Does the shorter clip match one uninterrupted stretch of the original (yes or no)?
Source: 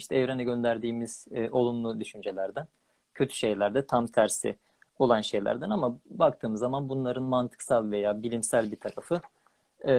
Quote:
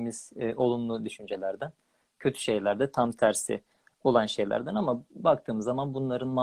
yes